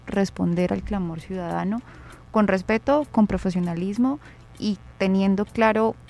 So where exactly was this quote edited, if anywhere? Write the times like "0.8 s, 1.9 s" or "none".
none